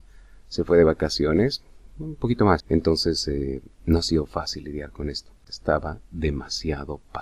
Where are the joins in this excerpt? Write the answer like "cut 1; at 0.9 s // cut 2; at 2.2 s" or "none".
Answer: cut 1; at 2.6 s // cut 2; at 5.5 s